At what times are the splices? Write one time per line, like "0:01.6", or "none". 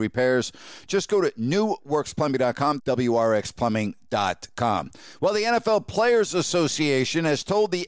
0:02.8